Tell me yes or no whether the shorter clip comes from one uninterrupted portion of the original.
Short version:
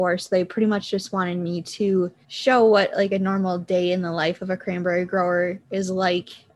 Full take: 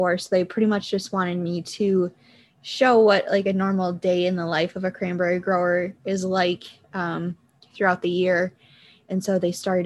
no